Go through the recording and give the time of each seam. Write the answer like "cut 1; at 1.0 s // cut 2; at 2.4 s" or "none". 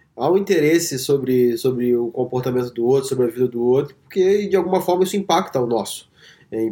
none